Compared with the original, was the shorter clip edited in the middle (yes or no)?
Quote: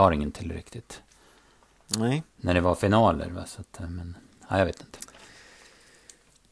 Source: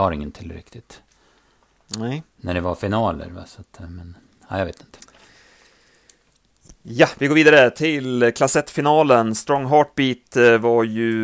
no